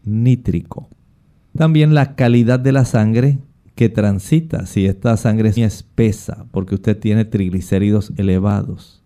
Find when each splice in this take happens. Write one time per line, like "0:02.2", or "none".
0:01.5
0:05.6